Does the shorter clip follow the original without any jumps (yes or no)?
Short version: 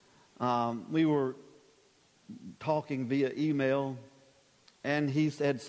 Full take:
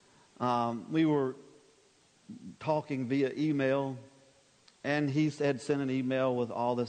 yes